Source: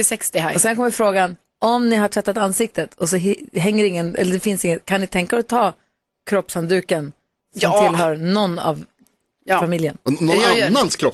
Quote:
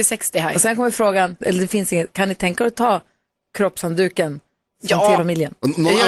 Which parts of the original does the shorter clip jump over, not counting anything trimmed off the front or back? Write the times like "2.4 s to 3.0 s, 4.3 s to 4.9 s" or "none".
1.4 s to 4.1 s, 7.9 s to 9.6 s